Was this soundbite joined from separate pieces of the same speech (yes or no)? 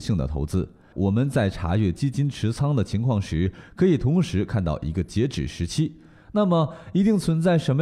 yes